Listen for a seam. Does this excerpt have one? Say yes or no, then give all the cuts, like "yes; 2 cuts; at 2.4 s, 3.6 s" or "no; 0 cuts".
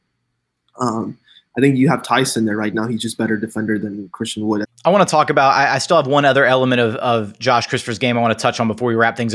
yes; 1 cut; at 4.6 s